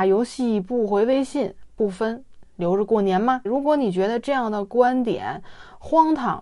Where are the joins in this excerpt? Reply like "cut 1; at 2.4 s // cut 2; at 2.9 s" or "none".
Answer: cut 1; at 3.5 s